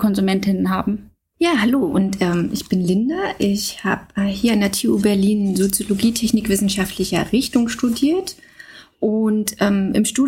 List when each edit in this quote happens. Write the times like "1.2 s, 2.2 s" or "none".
none